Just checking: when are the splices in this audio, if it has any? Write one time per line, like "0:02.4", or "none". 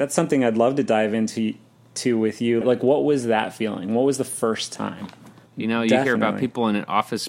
0:02.6
0:05.5